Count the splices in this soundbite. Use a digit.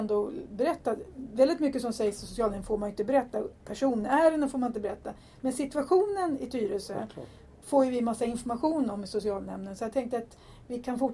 0